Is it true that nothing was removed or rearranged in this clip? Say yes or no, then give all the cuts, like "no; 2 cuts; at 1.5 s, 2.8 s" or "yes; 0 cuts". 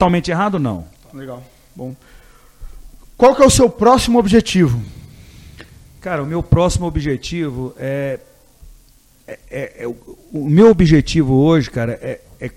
yes; 0 cuts